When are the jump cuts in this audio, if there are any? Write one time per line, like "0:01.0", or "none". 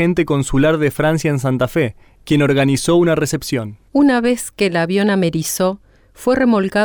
0:02.2
0:03.9